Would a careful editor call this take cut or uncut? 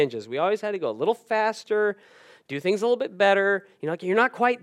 uncut